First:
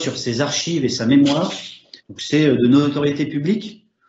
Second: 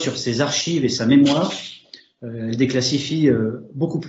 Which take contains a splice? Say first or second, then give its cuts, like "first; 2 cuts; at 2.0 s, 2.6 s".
first; 1 cut; at 2.0 s